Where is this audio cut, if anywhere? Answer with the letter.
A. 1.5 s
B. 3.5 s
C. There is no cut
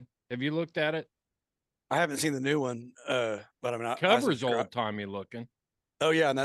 B